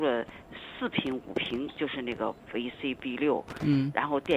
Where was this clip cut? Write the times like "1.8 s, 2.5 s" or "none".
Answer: none